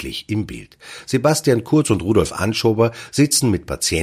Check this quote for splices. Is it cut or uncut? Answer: uncut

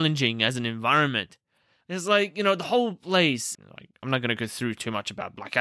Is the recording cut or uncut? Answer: cut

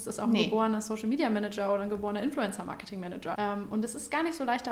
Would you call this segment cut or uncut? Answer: cut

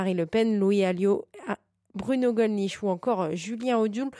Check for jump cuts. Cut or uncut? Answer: uncut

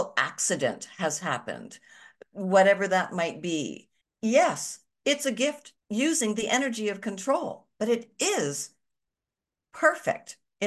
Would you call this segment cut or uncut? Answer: cut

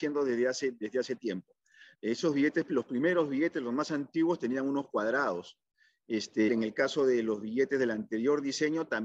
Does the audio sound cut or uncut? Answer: cut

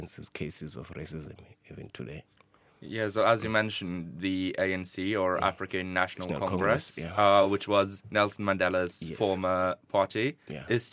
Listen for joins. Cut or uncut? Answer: uncut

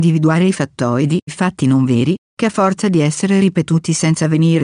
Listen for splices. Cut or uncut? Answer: cut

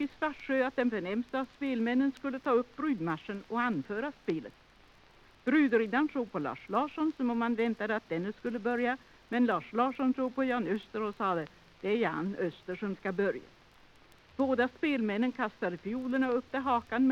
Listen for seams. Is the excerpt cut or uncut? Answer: cut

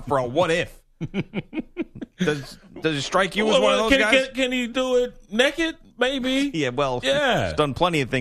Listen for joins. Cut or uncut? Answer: uncut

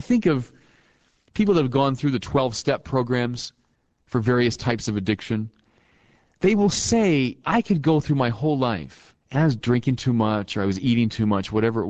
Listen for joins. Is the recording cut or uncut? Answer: cut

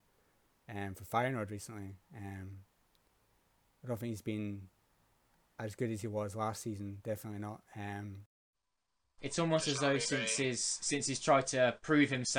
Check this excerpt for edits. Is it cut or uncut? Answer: uncut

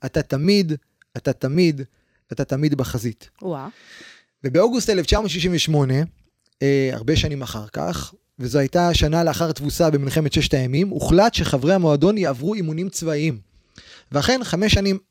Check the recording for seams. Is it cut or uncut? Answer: uncut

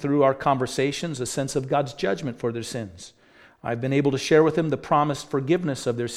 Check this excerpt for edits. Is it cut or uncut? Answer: uncut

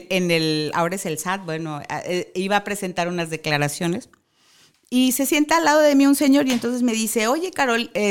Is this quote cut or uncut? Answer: uncut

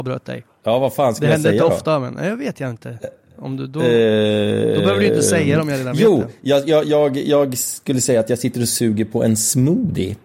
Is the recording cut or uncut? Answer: uncut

